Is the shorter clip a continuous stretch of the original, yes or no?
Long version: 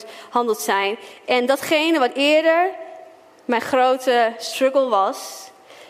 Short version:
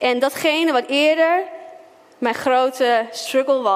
yes